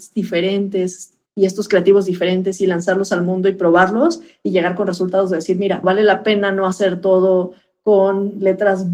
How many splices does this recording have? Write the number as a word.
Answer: two